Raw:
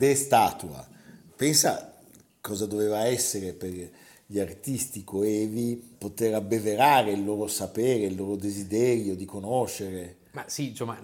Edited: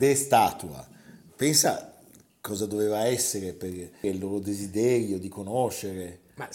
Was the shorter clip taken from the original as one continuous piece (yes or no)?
no